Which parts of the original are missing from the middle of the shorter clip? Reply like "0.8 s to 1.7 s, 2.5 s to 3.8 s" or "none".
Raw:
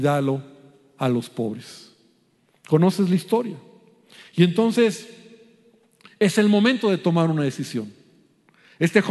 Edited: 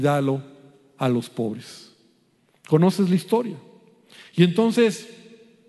none